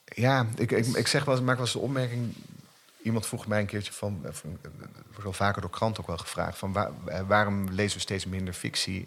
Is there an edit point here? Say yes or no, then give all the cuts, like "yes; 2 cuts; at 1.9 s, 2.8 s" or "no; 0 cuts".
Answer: no; 0 cuts